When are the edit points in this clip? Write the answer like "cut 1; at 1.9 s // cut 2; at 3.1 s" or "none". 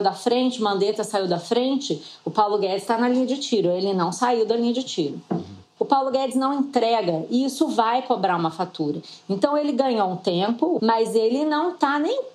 cut 1; at 5.8 s // cut 2; at 10.8 s